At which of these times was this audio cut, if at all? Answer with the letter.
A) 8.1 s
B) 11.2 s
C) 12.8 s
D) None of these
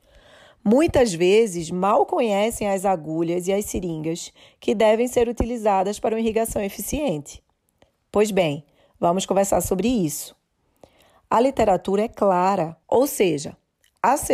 C